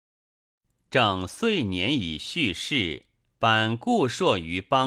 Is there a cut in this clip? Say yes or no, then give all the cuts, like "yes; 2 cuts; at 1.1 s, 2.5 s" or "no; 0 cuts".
yes; 1 cut; at 3.3 s